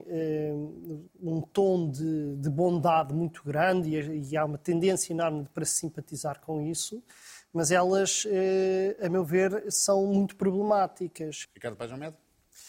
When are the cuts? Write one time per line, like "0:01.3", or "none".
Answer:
0:11.4